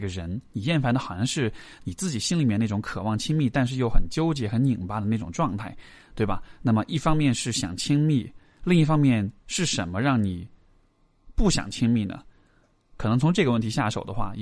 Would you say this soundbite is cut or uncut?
uncut